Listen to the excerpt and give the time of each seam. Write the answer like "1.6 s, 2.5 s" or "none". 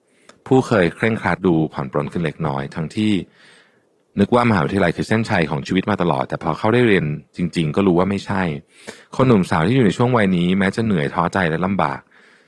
1.4 s

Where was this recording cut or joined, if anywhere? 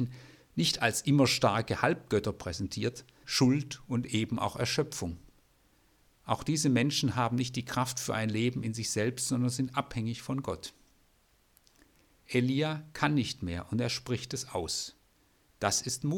3.2 s

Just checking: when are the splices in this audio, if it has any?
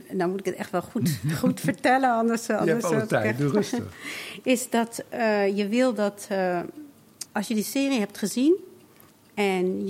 7.3 s

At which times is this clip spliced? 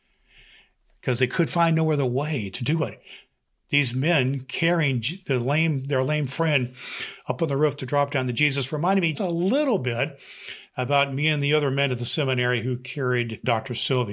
9.1 s

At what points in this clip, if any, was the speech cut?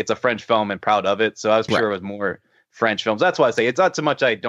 1.7 s

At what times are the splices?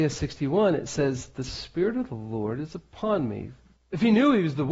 3.7 s

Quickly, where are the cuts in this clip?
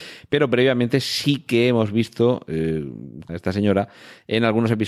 3.3 s

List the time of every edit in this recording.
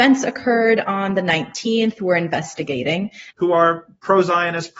3.3 s

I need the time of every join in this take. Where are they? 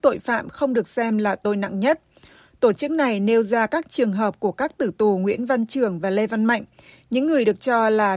none

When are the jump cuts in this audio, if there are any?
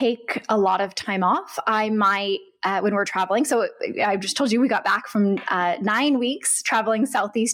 none

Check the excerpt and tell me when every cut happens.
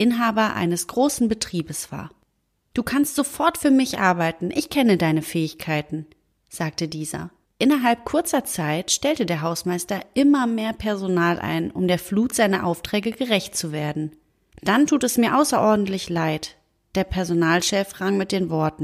7.4 s, 14.5 s

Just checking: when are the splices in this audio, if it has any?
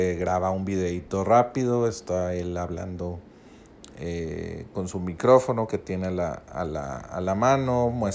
none

